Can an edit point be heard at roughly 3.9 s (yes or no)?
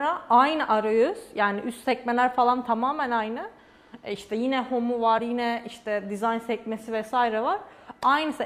no